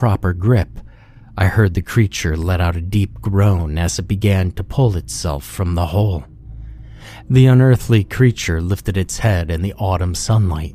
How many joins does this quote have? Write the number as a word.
one